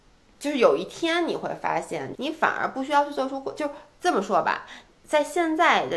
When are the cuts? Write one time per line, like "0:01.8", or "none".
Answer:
0:02.2